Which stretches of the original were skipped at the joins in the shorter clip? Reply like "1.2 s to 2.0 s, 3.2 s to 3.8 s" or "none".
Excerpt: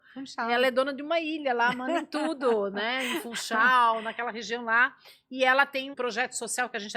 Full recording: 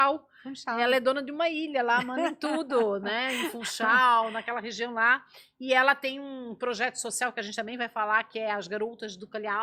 6.2 s to 6.6 s